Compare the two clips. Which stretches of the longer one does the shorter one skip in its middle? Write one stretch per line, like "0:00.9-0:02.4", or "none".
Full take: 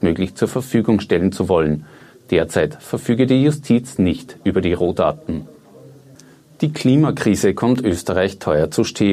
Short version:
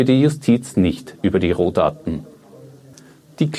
none